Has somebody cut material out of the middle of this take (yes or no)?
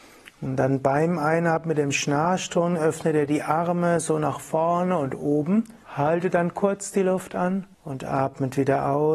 yes